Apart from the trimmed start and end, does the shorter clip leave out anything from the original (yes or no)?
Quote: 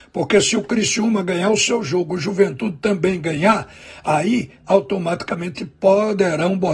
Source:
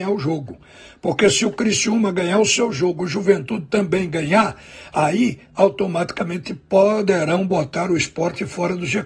no